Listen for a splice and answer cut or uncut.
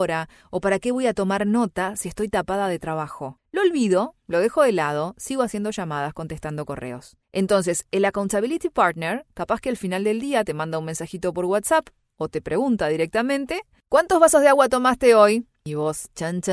uncut